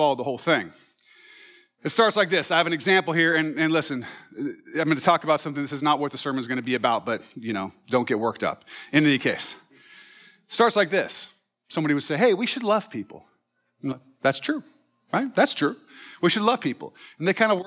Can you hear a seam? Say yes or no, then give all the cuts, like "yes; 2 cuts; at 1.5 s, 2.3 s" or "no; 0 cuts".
no; 0 cuts